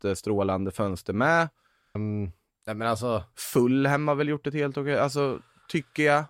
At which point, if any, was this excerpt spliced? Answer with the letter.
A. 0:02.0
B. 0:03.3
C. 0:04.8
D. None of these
A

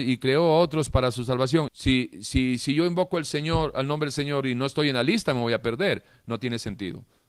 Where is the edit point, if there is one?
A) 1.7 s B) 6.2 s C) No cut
A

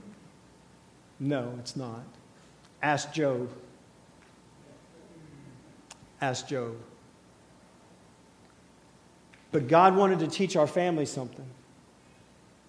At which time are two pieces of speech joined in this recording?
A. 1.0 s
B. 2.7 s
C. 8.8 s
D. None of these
D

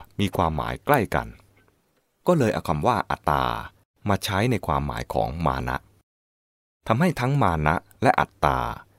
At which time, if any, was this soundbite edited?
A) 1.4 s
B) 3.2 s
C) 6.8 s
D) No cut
B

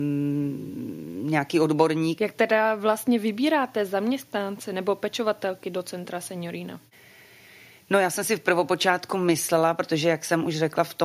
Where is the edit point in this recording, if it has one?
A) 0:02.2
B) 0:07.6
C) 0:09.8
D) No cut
A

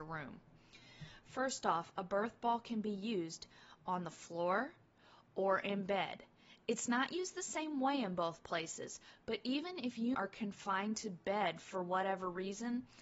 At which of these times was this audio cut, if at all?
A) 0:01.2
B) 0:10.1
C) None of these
B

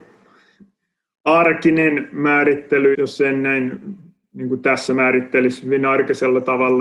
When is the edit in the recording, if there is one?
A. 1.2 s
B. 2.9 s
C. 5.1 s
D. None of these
B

